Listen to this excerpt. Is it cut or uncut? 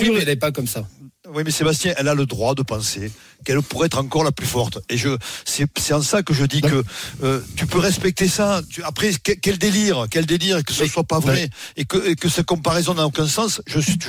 uncut